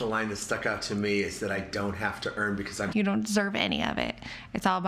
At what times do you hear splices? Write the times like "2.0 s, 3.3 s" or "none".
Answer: 2.9 s